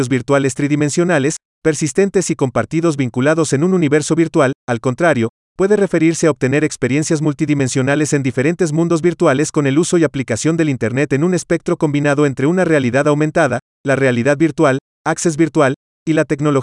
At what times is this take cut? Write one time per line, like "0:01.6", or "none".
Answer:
0:04.6